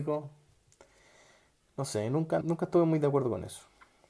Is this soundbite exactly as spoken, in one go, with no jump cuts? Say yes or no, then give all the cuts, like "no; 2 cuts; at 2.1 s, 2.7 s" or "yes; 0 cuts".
no; 1 cut; at 2.4 s